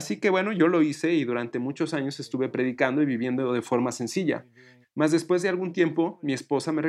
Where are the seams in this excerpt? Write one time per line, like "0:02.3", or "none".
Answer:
0:04.8